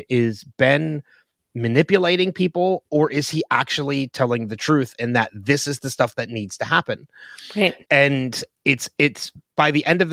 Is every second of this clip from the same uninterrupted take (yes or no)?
no